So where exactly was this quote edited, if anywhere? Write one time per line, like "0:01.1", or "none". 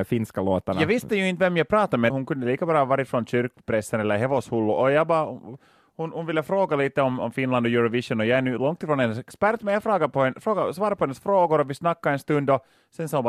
0:02.1

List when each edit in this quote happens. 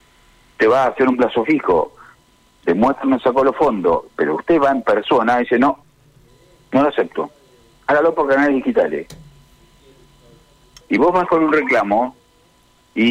0:10.8

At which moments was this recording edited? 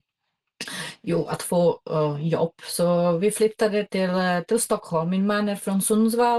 none

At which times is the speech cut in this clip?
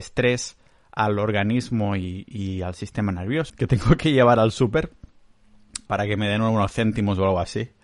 0:03.5
0:05.9

